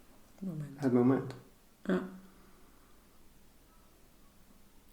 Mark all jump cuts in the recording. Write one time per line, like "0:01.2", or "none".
none